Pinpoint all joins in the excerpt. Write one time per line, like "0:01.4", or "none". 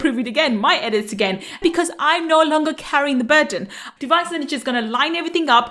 0:01.6
0:04.0